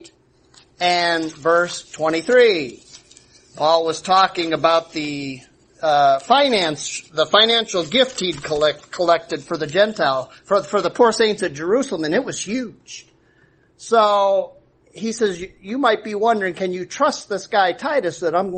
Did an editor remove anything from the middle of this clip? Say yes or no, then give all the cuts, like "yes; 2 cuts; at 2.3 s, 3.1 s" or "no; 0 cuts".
no; 0 cuts